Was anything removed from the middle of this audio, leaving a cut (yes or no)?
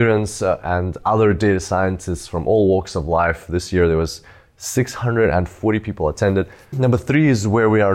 yes